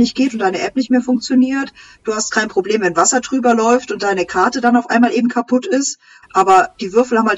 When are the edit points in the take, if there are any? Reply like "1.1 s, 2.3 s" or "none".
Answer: 6.2 s